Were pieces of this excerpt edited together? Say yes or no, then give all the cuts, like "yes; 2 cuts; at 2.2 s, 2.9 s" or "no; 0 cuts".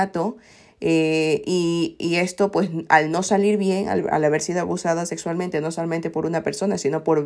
no; 0 cuts